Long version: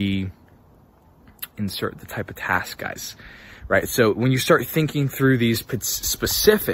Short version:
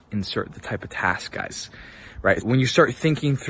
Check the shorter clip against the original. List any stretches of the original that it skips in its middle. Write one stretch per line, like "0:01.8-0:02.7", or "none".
0:03.9-0:04.1